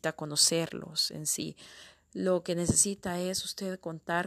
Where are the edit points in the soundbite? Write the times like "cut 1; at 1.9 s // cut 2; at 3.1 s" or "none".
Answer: none